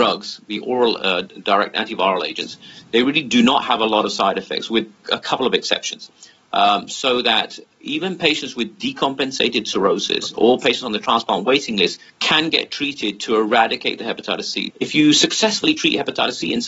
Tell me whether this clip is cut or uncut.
cut